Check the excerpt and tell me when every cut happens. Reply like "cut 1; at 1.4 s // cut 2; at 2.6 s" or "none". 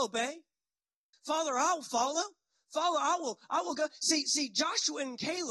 cut 1; at 1.1 s